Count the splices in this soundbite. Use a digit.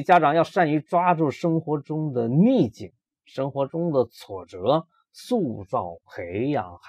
0